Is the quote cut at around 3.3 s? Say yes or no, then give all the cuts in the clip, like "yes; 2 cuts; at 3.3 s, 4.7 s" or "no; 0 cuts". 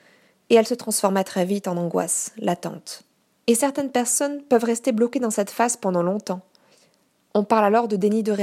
yes; 1 cut; at 3.3 s